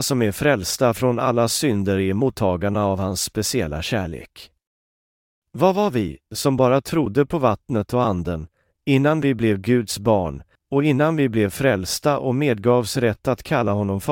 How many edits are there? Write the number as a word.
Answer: two